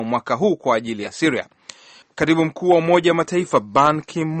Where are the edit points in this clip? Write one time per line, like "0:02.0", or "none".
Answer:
0:02.0